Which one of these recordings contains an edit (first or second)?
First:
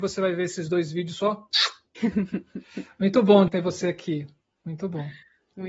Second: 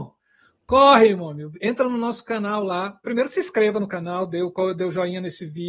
first